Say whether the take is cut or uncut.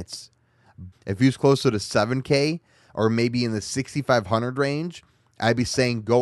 cut